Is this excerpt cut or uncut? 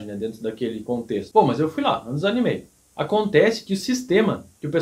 cut